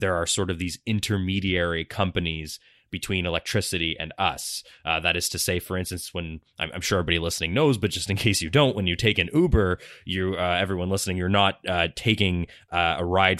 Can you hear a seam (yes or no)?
no